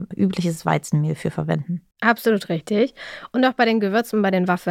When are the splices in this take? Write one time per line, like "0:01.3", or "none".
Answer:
0:01.9

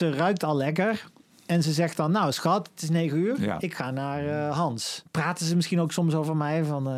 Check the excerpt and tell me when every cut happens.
0:05.1

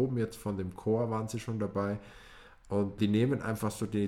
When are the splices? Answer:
0:03.0

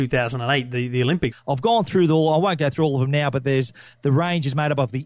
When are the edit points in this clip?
0:01.3

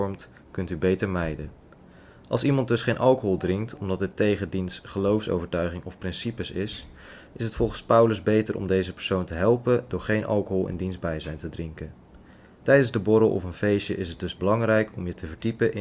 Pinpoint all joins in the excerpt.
none

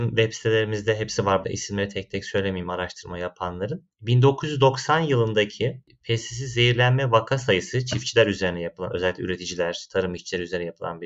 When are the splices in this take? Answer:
0:01.4

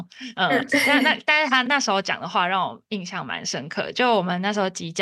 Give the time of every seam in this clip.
0:01.6

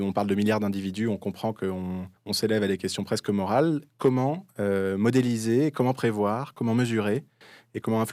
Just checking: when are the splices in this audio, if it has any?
0:02.2

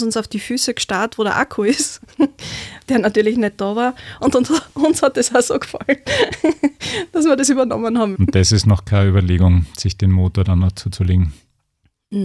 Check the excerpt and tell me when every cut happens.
0:04.2
0:08.2

